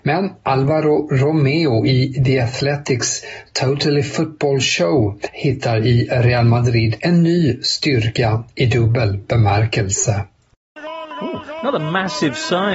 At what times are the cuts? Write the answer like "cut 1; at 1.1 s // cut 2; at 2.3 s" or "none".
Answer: none